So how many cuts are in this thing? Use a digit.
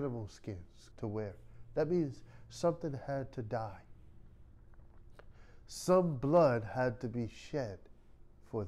1